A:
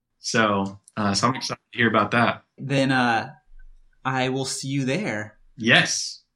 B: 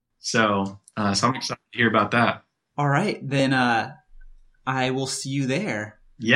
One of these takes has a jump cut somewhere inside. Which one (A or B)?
A